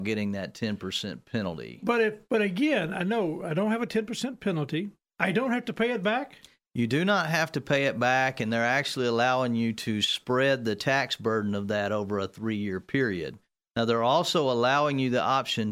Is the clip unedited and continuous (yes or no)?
no